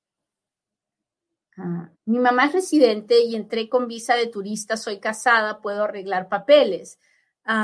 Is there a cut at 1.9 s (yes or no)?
yes